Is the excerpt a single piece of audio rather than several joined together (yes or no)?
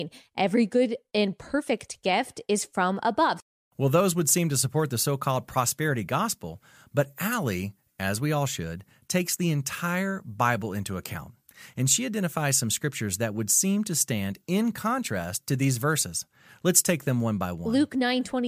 yes